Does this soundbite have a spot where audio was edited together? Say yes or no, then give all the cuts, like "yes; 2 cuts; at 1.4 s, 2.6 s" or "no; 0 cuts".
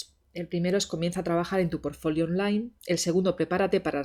no; 0 cuts